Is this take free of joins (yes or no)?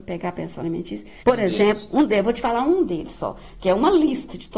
no